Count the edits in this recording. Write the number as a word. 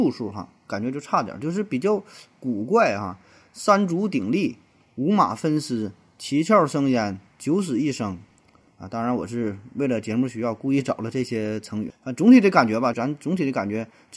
two